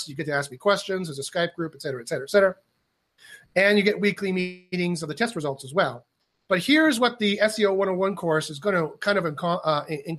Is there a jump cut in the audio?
no; 0 cuts

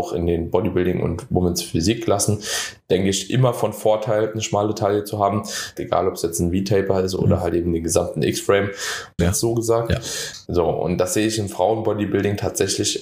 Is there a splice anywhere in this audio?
yes; 3 cuts; at 5.8 s, 9.2 s, 10.5 s

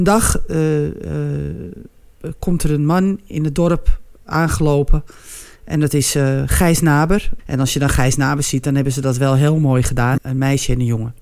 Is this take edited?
yes; 2 cuts; at 7.4 s, 10.2 s

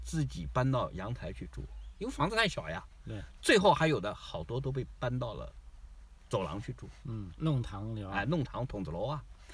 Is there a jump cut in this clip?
yes; 1 cut; at 7.3 s

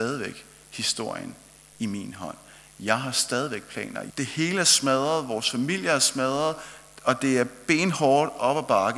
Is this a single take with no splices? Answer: no; 1 cut; at 4.1 s

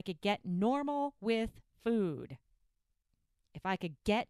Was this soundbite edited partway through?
no; 0 cuts

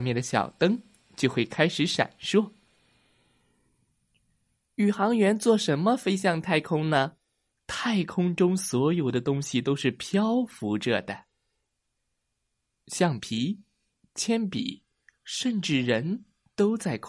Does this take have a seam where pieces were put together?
yes; 3 cuts; at 7.5 s, 12.7 s, 15.1 s

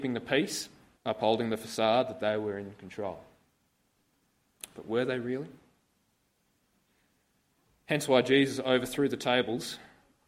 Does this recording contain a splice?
yes; 1 cut; at 1.0 s

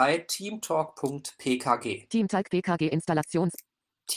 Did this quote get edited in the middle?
no; 0 cuts

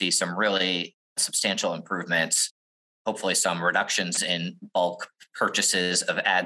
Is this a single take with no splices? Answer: yes; 0 cuts

